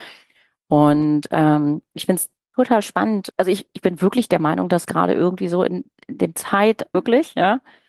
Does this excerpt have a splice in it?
yes; 1 cut; at 6.9 s

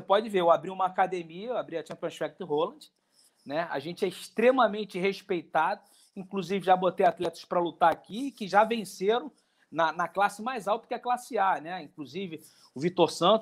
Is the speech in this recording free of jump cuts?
yes; 0 cuts

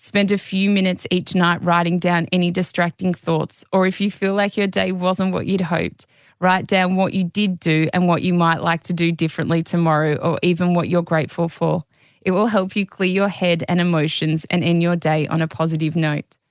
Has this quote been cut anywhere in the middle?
no; 0 cuts

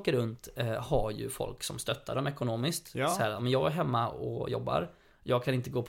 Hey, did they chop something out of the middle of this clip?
no; 0 cuts

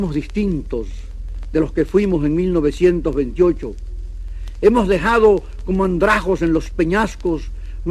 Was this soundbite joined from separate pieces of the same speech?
no; 0 cuts

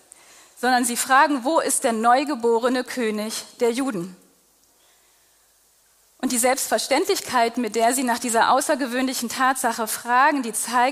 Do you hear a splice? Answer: no; 0 cuts

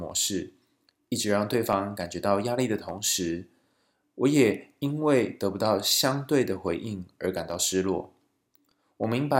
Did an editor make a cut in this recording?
no; 0 cuts

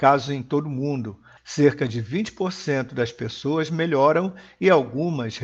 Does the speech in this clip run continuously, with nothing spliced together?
no; 1 cut; at 1.4 s

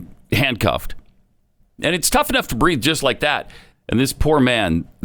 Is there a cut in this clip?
yes; 1 cut; at 3.7 s

